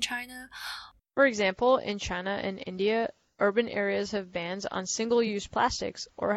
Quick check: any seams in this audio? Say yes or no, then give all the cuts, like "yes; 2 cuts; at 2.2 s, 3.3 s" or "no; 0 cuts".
yes; 1 cut; at 1.0 s